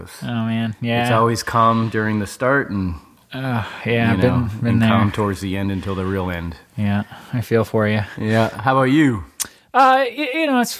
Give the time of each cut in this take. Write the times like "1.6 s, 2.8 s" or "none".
none